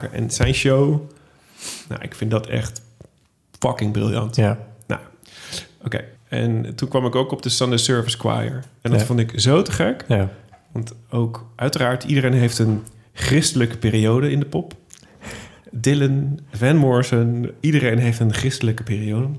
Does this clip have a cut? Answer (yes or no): yes